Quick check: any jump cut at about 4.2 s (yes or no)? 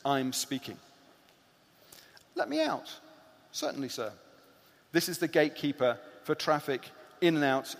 no